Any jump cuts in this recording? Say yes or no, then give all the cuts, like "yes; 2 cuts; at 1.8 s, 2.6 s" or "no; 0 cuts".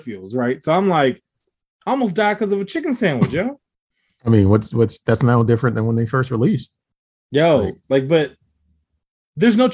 no; 0 cuts